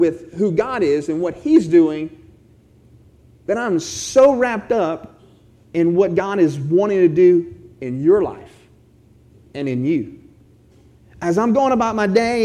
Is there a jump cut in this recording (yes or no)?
no